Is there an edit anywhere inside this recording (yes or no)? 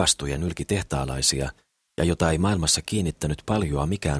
yes